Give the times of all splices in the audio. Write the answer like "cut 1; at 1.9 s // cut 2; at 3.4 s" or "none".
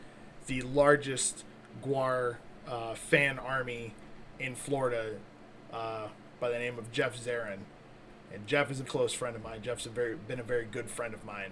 cut 1; at 8.8 s